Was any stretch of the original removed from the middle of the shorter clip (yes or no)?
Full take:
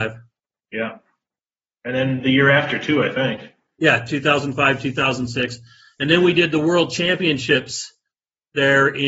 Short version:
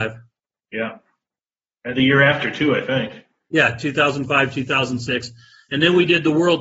yes